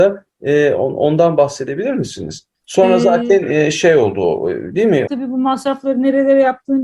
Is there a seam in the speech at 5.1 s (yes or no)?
yes